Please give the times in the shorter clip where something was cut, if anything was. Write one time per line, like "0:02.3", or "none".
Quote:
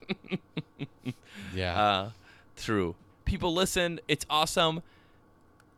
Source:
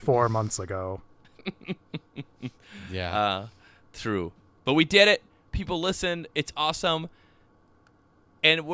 0:03.1